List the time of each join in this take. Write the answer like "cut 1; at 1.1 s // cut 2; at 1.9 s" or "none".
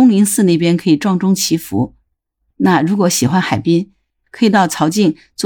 none